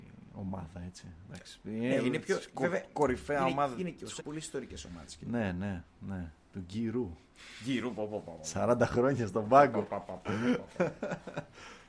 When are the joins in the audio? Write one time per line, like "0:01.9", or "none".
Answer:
0:04.2